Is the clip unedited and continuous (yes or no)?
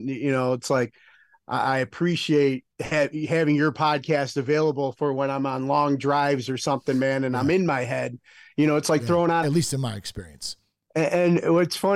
no